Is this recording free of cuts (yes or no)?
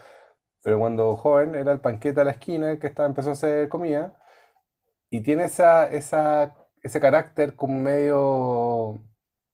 yes